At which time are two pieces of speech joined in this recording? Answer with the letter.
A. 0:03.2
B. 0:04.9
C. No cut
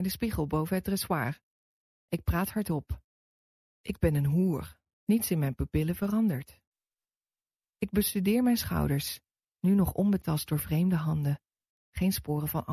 B